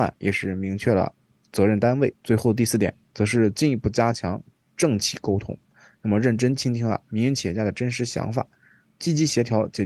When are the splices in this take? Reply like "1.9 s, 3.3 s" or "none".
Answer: 2.2 s